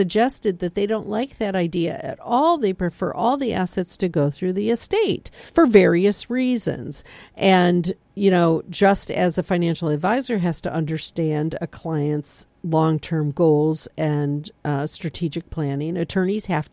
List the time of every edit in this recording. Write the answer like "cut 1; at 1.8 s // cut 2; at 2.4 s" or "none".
cut 1; at 5.5 s